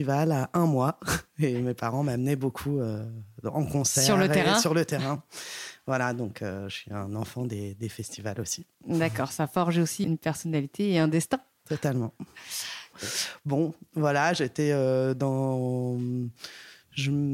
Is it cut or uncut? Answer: cut